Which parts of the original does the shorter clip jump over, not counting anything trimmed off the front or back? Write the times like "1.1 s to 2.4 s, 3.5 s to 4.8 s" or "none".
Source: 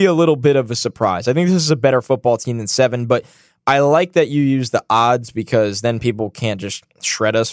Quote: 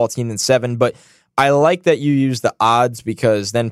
none